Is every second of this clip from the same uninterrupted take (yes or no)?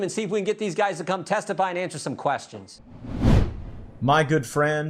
yes